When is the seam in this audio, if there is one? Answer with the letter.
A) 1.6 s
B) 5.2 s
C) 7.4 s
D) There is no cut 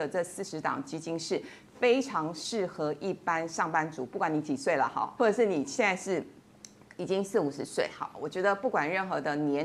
B